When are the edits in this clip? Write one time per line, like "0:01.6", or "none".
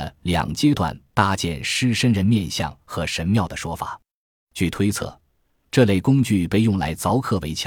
0:04.3